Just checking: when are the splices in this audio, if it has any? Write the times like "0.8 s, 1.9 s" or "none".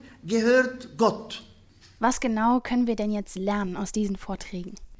2.0 s

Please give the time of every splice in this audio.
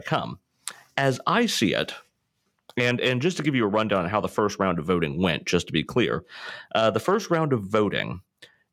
none

